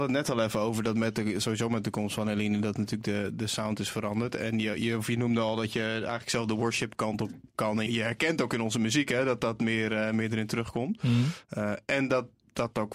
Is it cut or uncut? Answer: cut